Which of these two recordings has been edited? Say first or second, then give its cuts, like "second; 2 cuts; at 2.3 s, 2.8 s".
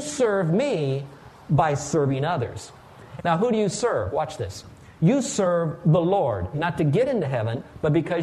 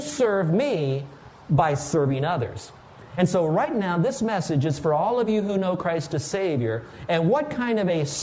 first; 2 cuts; at 3.2 s, 6.5 s